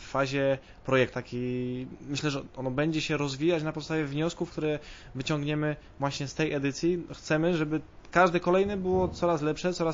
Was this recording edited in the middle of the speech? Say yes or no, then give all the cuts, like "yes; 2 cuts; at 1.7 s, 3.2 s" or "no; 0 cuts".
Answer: yes; 1 cut; at 1.1 s